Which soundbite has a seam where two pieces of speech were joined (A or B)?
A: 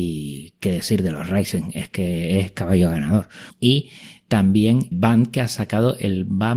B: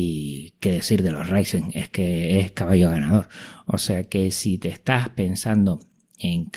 A